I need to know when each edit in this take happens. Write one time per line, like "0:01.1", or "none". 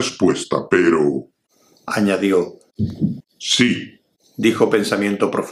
0:03.2